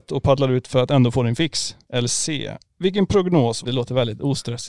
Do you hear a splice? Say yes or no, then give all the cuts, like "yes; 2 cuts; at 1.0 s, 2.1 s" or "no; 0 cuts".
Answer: yes; 2 cuts; at 1.8 s, 3.6 s